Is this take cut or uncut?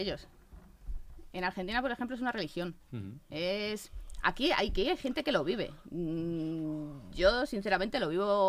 uncut